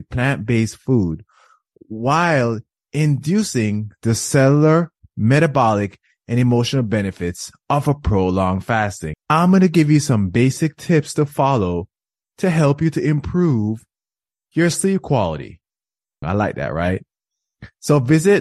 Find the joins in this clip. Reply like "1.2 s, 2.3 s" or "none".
9.1 s, 16.2 s